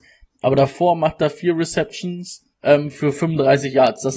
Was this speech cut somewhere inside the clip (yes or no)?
yes